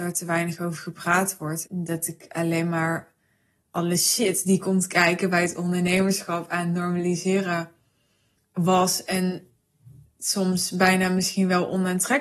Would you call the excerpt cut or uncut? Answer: cut